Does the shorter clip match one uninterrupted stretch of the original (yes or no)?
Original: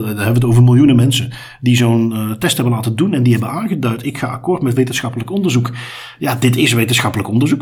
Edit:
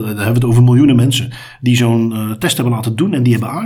yes